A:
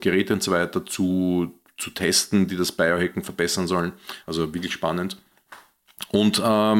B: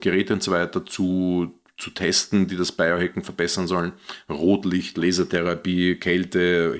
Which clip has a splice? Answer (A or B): A